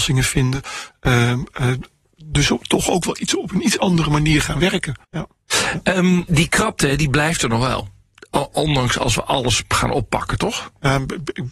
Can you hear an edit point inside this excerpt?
yes; 2 cuts; at 5.0 s, 6.3 s

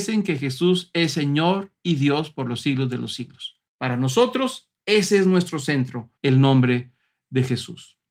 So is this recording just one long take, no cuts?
no; 2 cuts; at 3.7 s, 6.2 s

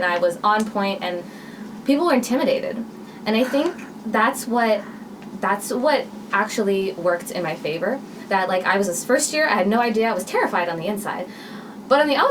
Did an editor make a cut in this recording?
no; 0 cuts

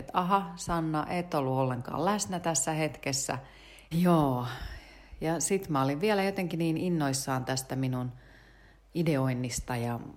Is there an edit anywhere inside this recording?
yes; 1 cut; at 3.9 s

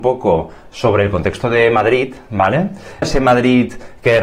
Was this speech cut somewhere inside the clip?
yes; 1 cut; at 3.0 s

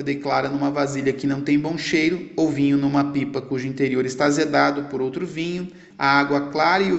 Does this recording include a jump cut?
yes; 1 cut; at 5.9 s

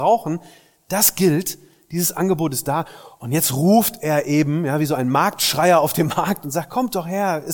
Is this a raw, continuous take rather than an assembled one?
yes; 0 cuts

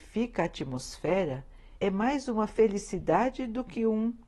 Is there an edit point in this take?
yes; 1 cut; at 1.8 s

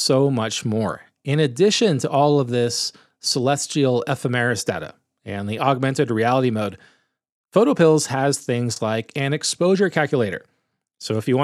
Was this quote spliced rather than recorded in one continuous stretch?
no; 0 cuts

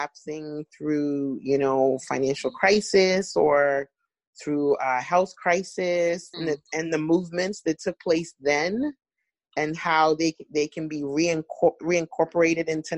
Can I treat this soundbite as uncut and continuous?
no; 1 cut; at 6.3 s

